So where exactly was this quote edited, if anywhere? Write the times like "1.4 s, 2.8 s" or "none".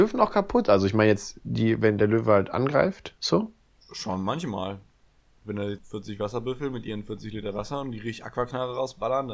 3.2 s, 5.8 s